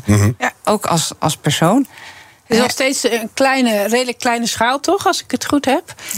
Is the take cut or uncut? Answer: uncut